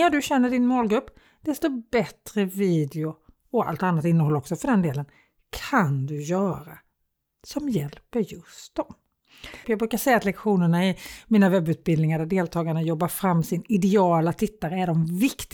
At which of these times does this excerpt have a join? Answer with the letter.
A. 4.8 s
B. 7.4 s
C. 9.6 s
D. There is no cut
C